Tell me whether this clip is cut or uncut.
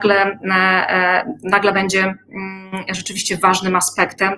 uncut